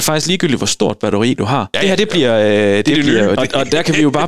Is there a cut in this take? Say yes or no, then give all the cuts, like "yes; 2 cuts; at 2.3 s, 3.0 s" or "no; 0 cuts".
yes; 2 cuts; at 1.7 s, 3.4 s